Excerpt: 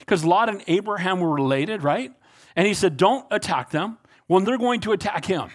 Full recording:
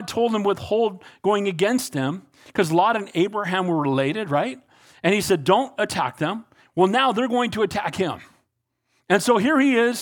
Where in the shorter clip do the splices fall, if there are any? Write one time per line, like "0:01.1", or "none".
0:04.4

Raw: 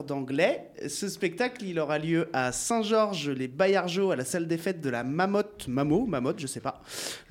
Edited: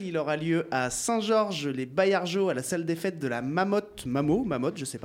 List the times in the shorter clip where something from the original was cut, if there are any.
none

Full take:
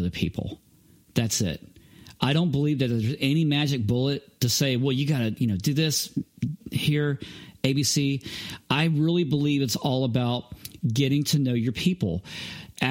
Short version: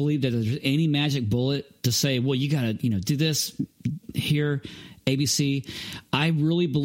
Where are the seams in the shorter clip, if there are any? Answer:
none

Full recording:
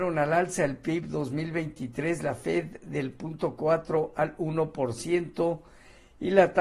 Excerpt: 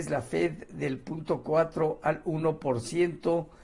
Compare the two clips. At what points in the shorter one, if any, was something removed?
none

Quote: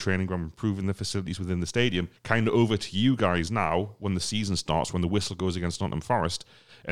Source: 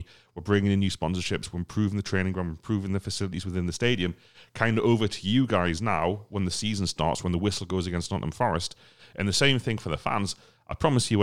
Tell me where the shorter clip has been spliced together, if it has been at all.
0:02.2

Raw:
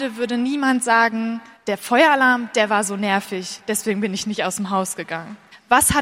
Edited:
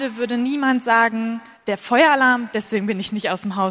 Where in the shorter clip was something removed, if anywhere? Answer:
0:02.5

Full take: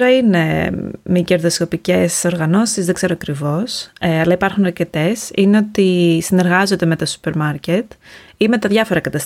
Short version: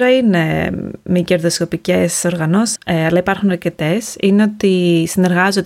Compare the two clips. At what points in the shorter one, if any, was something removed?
0:02.8

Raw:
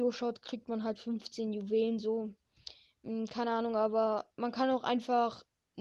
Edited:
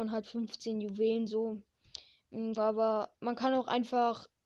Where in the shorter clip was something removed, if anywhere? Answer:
0:02.6

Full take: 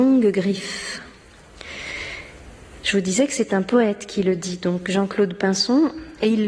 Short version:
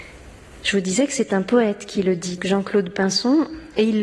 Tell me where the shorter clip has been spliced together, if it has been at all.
0:02.4

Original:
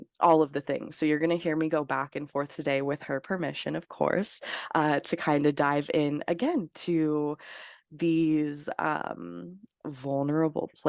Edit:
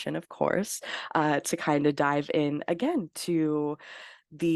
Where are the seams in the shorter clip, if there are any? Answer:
none

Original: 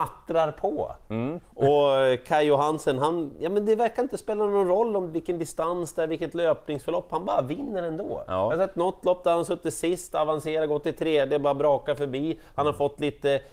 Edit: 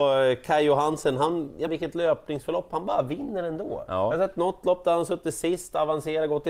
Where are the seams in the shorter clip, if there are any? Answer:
0:01.7

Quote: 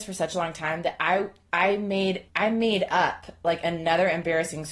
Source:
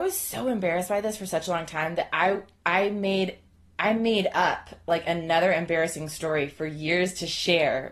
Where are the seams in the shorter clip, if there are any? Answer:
0:02.3

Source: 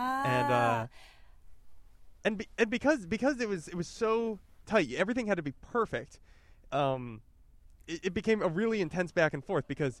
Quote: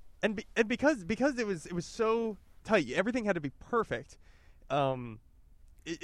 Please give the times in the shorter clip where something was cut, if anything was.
none

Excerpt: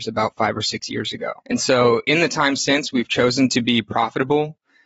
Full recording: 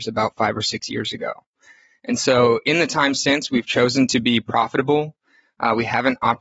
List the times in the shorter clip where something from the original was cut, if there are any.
0:01.4

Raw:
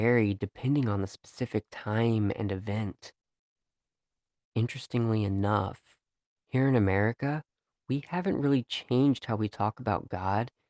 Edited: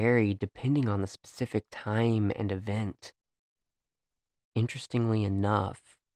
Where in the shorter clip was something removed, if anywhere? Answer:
none

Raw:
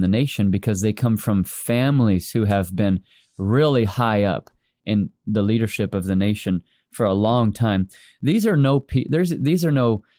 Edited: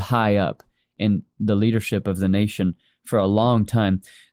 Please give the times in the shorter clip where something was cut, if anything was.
none

